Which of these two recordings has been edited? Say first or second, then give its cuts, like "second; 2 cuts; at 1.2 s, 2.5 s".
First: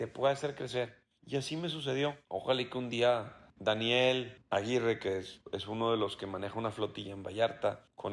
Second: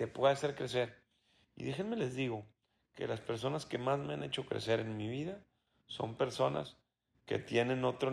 first; 1 cut; at 1.2 s